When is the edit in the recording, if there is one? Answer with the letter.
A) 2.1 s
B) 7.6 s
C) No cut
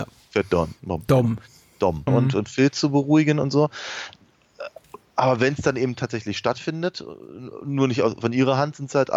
A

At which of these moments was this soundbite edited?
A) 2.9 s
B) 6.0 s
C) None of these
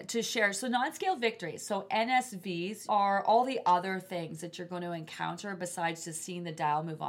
A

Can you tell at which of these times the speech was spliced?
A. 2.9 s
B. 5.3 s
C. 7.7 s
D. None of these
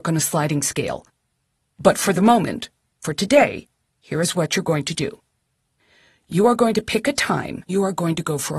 C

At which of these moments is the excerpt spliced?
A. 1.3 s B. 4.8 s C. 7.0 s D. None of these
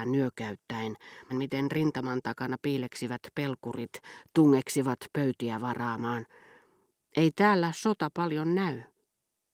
A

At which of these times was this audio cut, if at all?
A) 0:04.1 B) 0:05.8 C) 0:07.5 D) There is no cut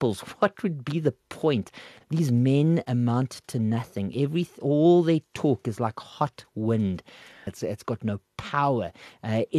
C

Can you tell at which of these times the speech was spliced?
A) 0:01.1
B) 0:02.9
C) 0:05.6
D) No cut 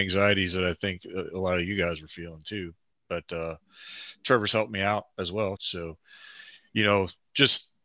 C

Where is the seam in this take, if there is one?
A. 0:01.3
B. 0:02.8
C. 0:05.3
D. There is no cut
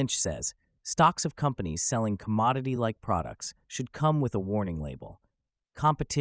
D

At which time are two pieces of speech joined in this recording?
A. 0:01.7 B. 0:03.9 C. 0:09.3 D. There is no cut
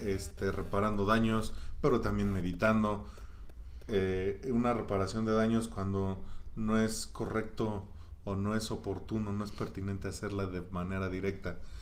B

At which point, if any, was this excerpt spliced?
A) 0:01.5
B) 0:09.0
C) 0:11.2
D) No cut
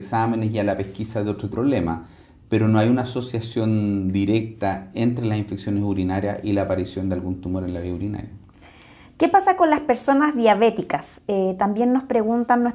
A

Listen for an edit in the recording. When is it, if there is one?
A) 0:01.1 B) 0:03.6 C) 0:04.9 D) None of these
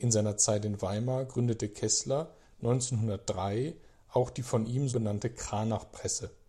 C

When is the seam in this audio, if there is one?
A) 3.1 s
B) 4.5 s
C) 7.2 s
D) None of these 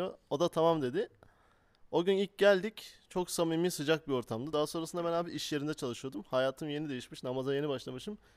D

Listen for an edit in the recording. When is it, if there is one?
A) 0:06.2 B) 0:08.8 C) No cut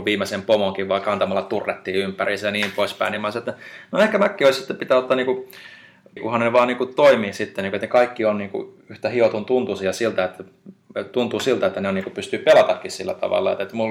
A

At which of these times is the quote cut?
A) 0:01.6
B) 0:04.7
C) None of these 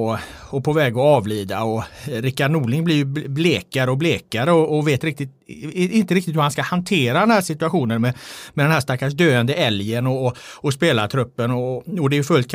C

